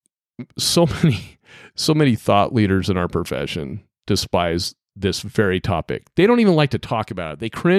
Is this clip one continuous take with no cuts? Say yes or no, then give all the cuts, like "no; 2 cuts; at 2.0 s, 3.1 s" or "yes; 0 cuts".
yes; 0 cuts